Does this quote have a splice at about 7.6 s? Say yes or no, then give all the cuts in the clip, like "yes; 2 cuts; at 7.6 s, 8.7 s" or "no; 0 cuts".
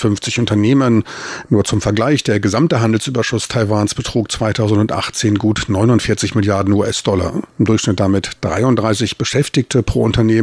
yes; 2 cuts; at 1.4 s, 7.6 s